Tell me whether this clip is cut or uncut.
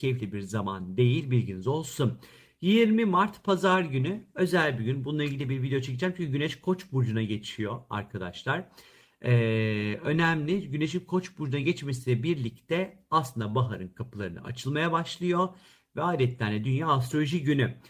uncut